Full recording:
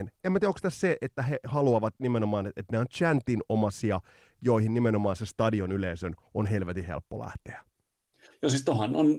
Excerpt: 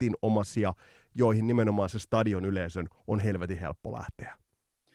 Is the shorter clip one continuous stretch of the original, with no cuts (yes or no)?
yes